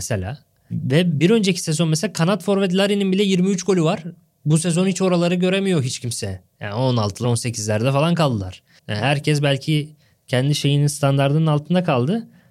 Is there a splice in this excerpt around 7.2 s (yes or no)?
yes